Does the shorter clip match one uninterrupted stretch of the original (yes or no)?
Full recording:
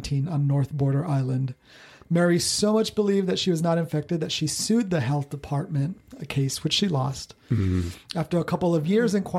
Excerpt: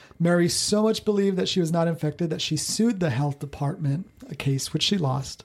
yes